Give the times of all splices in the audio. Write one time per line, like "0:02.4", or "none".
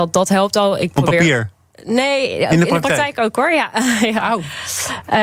none